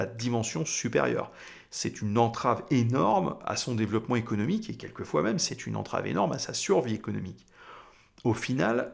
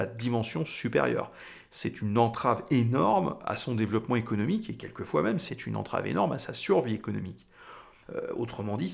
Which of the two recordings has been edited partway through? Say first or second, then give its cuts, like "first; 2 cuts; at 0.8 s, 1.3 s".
second; 1 cut; at 8.0 s